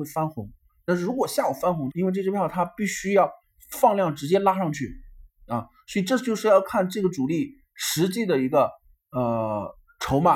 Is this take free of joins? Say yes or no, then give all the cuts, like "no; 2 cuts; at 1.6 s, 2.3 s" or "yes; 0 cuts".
no; 1 cut; at 1.9 s